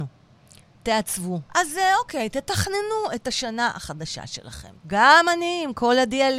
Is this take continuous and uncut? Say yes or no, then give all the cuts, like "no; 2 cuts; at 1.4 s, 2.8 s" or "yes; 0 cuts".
no; 2 cuts; at 1.5 s, 4.8 s